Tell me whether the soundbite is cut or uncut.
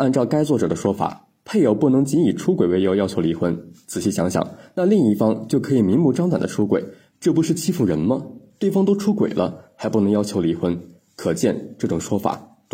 uncut